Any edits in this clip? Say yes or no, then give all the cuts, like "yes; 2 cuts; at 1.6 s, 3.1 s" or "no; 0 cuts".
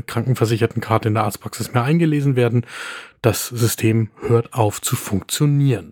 no; 0 cuts